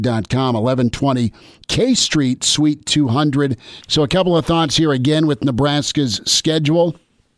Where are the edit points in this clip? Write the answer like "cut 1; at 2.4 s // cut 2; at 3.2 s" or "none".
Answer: cut 1; at 3.8 s

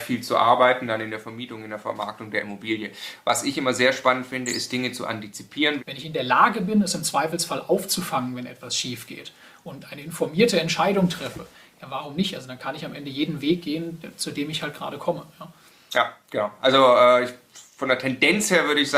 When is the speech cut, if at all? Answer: cut 1; at 5.8 s

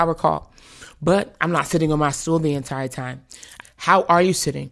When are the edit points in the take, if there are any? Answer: cut 1; at 3.6 s

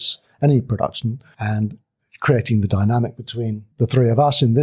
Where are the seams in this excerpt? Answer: cut 1; at 3.7 s

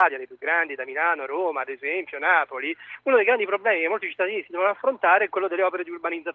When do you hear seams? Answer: none

